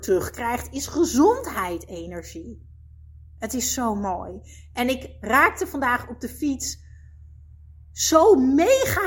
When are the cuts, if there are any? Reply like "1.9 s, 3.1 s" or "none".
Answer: 3.3 s

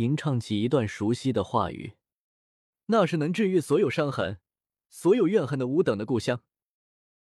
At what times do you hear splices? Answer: none

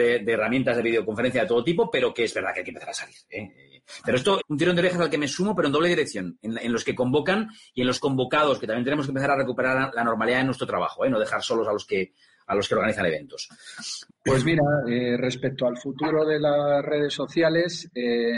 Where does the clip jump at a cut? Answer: 4.4 s, 14.1 s

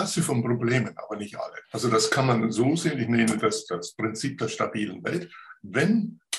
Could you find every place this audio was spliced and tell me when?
1.6 s

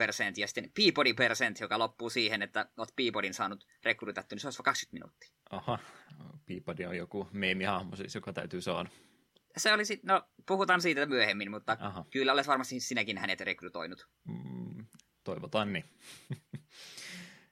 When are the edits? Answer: none

